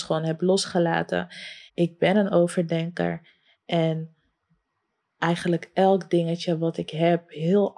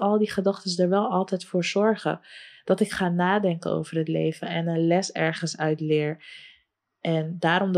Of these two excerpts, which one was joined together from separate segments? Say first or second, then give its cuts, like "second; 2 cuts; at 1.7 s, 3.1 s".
first; 2 cuts; at 1.7 s, 3.5 s